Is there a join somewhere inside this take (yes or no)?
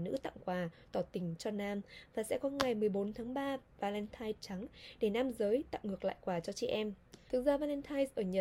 yes